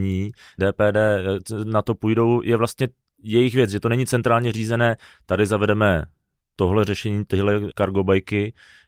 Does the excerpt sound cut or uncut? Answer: uncut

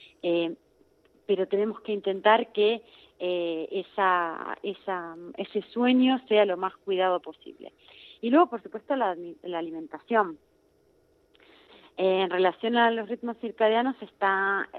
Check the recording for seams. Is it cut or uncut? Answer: uncut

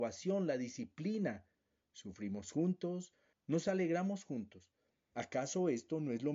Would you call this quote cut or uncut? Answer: cut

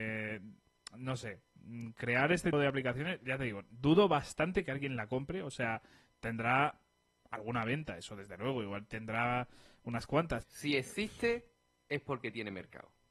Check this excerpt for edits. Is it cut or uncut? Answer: cut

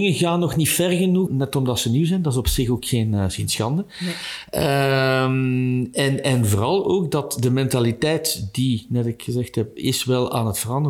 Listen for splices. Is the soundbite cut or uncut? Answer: cut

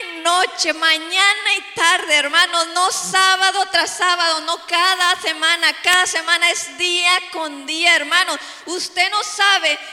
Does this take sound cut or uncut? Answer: uncut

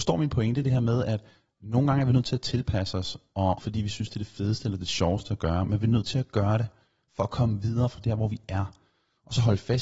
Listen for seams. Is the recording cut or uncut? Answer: cut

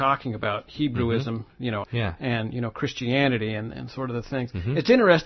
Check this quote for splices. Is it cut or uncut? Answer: cut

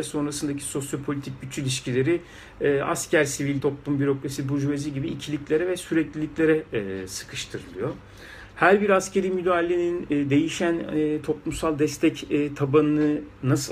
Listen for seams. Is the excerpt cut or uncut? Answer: cut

